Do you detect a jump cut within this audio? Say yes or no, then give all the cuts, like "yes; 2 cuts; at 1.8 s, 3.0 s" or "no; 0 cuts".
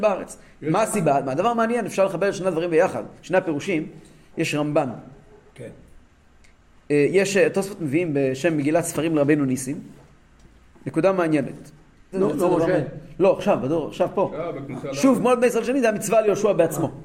yes; 1 cut; at 12.1 s